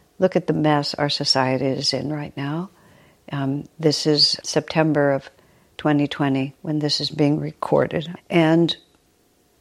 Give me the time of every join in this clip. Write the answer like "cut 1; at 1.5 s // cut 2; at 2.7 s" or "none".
cut 1; at 4.4 s // cut 2; at 8.2 s